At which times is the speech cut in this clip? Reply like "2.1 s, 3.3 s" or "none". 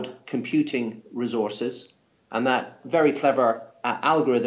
none